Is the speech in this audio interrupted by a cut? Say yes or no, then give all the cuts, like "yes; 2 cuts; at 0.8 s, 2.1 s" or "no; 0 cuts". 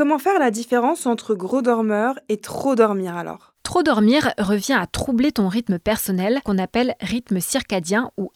no; 0 cuts